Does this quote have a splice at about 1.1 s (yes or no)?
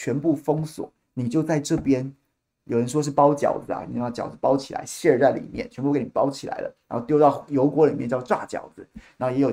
no